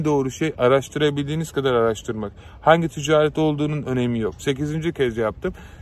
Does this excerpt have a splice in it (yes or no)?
yes